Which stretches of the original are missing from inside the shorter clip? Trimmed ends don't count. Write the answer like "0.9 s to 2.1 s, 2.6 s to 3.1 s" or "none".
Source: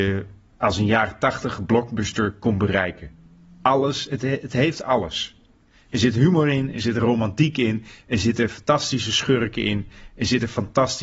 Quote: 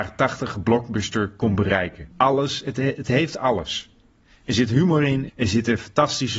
3.1 s to 3.6 s, 6.7 s to 8.0 s